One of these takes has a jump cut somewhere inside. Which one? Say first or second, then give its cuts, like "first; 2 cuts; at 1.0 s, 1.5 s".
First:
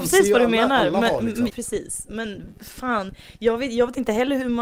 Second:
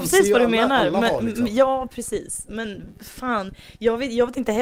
first; 1 cut; at 1.5 s